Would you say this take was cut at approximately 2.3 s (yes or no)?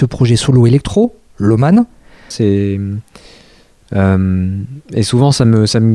yes